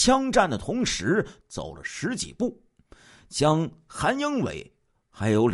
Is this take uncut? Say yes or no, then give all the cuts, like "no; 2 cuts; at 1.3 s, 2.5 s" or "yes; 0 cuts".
no; 1 cut; at 1.4 s